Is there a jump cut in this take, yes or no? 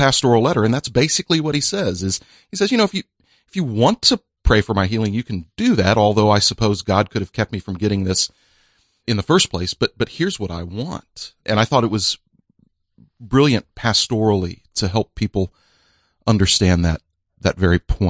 no